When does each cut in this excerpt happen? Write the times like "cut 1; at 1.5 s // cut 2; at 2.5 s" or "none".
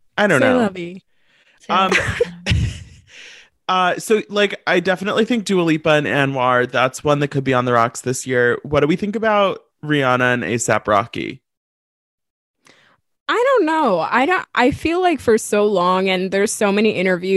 none